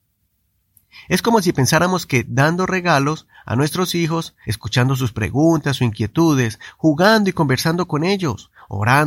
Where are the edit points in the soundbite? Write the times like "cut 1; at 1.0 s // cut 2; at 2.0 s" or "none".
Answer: cut 1; at 4.4 s